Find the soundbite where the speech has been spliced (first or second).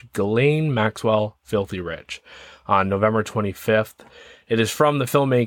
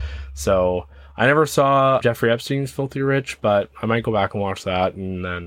second